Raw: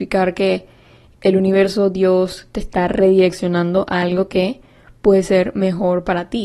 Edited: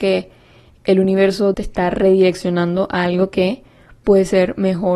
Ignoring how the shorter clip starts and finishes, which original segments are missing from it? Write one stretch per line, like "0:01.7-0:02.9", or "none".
0:01.9-0:02.5